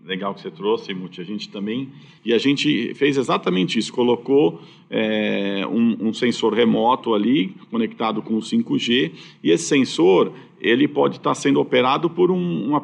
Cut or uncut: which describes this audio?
cut